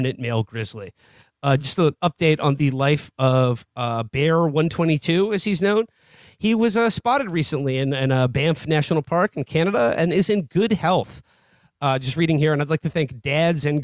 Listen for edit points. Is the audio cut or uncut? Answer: uncut